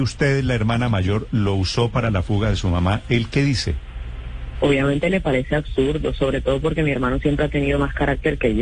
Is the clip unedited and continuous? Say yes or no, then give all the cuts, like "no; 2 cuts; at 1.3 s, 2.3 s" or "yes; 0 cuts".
yes; 0 cuts